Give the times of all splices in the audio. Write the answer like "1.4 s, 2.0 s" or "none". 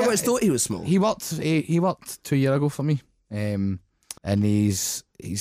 4.2 s